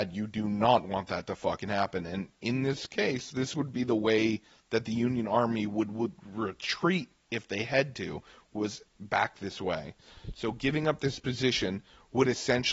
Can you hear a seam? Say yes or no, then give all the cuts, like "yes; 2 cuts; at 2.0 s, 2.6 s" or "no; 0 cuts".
no; 0 cuts